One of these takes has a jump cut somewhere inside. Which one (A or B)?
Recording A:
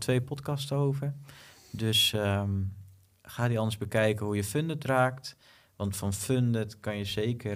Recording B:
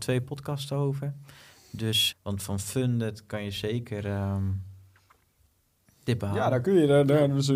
B